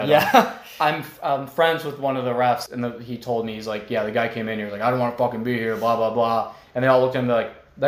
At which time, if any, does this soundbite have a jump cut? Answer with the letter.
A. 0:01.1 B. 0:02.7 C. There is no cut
B